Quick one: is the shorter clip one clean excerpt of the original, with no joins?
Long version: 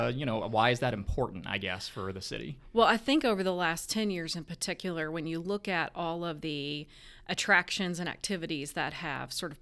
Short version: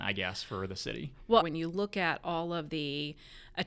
no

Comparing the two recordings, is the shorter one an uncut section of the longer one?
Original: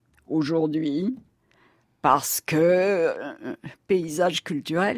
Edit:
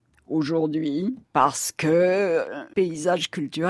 no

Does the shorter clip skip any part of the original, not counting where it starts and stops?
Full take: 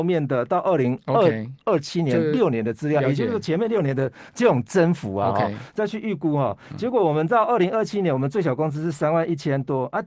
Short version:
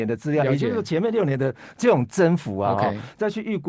no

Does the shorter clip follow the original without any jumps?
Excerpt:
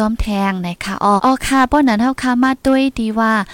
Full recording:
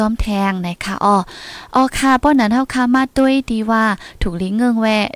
no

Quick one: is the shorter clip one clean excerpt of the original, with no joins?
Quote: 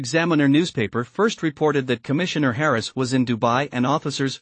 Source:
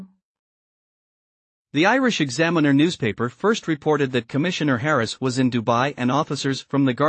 yes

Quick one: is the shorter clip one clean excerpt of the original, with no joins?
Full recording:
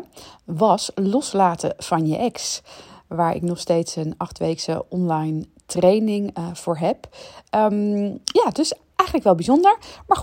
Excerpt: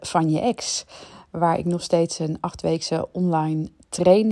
yes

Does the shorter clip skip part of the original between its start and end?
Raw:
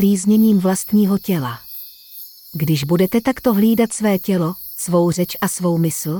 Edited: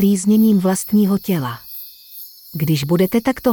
no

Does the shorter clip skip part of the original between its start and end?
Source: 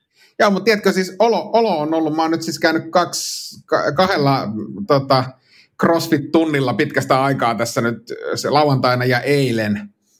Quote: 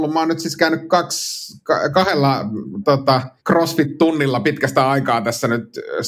yes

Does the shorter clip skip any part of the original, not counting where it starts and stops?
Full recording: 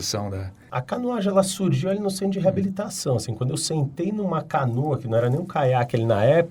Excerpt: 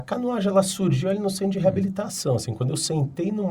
no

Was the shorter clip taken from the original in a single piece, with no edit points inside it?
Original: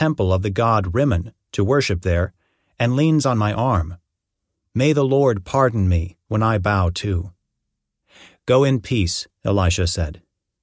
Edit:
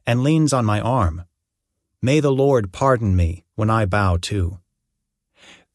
yes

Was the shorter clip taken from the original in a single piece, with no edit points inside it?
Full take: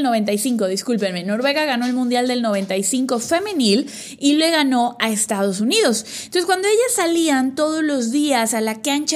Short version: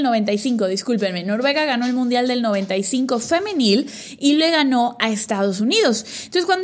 yes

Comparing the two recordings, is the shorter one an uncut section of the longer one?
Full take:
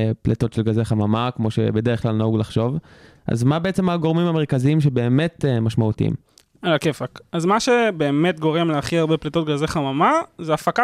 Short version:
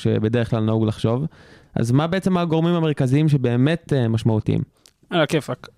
yes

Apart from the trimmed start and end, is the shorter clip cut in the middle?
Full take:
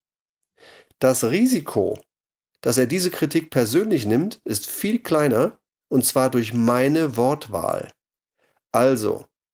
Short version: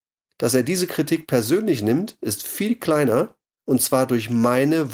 no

